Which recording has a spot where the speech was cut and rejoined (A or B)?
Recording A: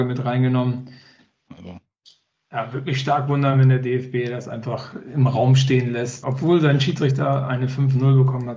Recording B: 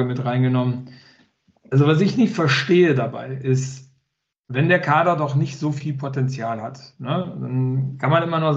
A